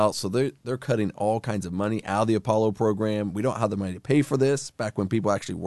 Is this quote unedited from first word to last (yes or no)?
yes